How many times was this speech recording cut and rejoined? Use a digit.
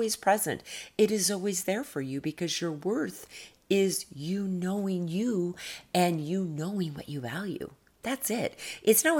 0